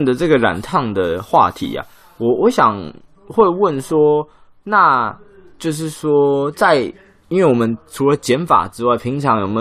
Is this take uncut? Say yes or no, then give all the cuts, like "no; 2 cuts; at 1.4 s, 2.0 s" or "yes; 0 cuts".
yes; 0 cuts